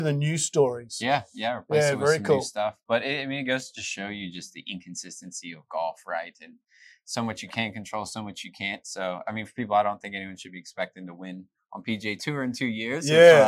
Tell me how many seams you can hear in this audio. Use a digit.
0